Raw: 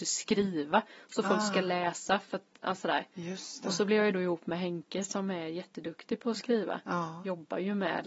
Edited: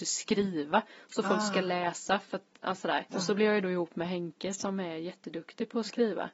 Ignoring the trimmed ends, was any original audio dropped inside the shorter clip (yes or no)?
yes